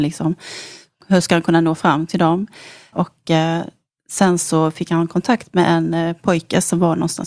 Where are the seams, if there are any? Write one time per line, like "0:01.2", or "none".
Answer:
0:02.9